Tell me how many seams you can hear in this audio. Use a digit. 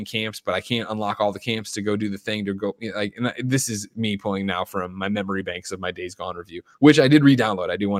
0